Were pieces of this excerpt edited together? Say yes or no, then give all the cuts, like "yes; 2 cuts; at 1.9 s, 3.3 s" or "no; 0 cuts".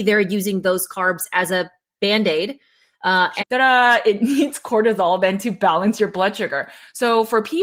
yes; 1 cut; at 3.4 s